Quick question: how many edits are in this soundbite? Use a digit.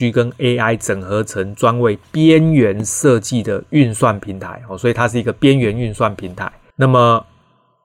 1